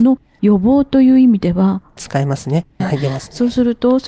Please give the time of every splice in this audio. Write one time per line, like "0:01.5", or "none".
0:02.8